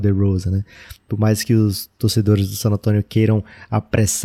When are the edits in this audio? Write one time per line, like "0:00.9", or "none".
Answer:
none